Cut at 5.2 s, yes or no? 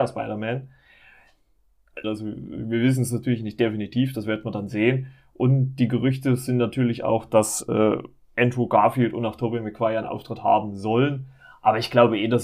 no